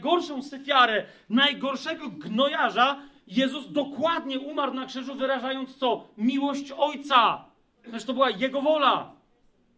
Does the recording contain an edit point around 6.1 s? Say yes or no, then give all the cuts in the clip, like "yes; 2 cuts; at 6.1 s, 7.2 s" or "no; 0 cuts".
no; 0 cuts